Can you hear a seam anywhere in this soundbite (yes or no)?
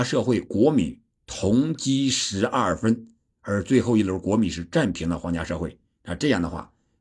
no